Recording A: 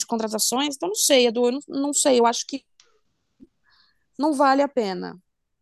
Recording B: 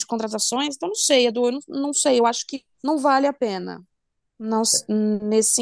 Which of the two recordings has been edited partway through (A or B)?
B